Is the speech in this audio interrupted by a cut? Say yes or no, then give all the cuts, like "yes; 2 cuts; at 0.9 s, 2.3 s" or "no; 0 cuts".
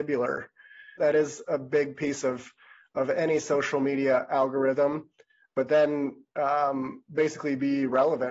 yes; 1 cut; at 1.0 s